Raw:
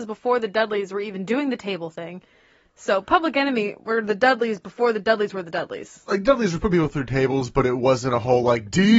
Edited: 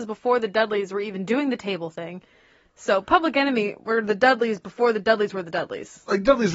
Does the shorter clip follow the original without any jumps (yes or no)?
yes